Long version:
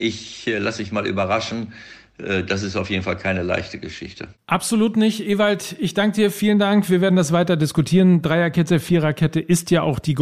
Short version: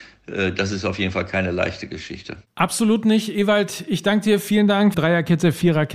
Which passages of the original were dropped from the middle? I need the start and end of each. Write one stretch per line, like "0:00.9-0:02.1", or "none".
0:06.9-0:08.2